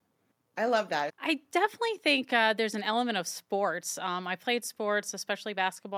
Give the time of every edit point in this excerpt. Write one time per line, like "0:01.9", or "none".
0:01.1